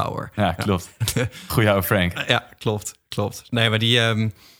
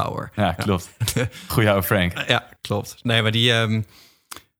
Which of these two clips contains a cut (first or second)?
second